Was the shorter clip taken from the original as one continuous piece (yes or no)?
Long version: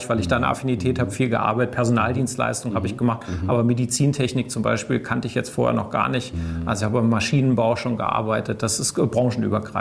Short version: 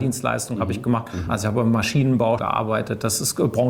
no